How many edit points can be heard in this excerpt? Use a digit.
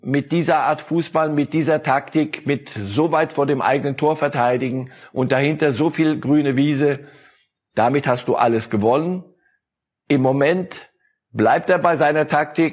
0